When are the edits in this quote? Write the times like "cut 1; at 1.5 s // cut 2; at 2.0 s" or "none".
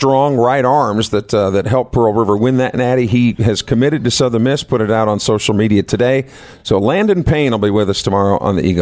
none